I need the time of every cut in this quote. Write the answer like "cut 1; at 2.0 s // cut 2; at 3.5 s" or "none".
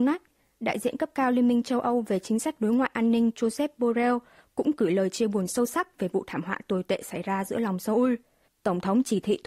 cut 1; at 8.5 s